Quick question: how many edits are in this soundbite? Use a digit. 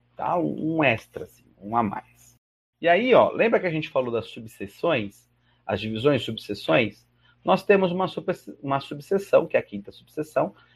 1